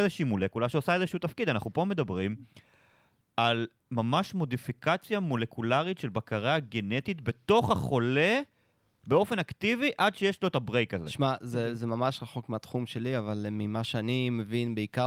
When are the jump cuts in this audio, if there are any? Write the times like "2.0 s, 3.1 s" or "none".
none